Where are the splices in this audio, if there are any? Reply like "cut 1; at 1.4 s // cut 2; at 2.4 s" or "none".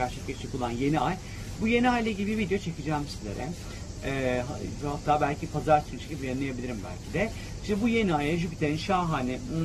none